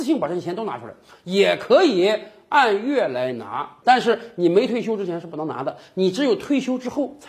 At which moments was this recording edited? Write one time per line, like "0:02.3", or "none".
0:03.8